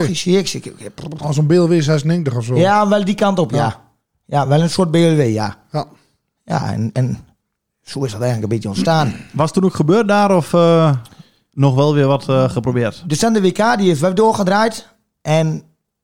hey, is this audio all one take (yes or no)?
yes